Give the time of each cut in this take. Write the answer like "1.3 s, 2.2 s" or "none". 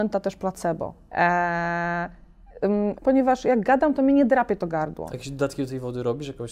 1.1 s, 3.0 s